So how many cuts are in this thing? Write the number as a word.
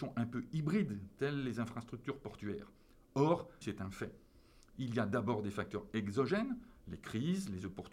one